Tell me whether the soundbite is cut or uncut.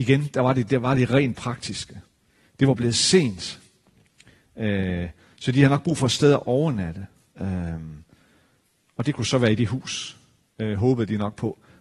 cut